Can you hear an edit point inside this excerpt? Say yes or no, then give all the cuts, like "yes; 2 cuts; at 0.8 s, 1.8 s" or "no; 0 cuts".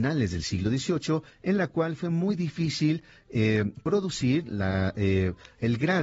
no; 0 cuts